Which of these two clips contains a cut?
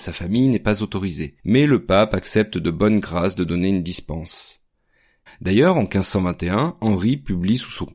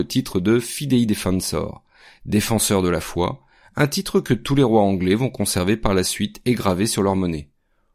first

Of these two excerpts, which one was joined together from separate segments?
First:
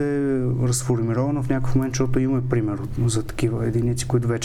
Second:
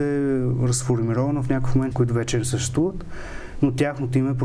second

